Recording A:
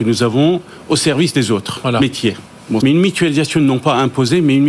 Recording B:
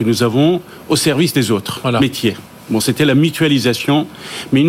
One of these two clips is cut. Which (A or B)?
A